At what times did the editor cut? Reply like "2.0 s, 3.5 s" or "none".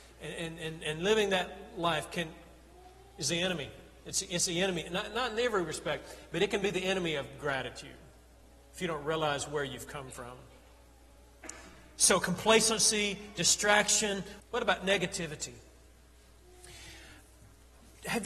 14.4 s